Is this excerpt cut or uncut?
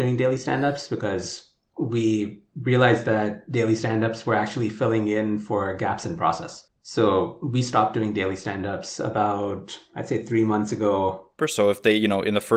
cut